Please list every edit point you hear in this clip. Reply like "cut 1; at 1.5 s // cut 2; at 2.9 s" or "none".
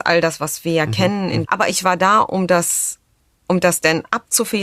cut 1; at 1.4 s